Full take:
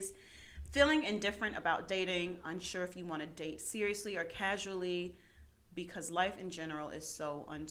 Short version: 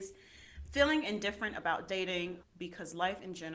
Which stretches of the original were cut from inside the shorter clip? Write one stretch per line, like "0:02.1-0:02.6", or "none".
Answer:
0:02.4-0:05.6